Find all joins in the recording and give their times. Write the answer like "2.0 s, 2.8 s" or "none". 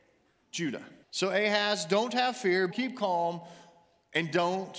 1.0 s, 2.7 s